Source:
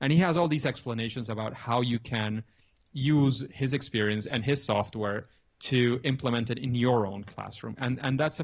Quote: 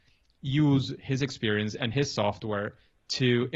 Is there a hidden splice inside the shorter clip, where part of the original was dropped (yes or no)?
no